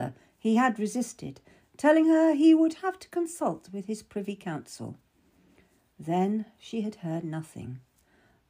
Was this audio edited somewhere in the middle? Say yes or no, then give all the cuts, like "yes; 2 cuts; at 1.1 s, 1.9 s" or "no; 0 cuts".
no; 0 cuts